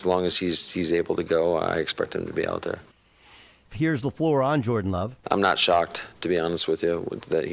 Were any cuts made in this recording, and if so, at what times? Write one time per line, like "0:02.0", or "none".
0:03.7